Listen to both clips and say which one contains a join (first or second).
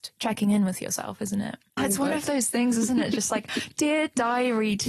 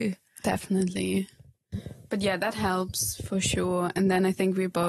first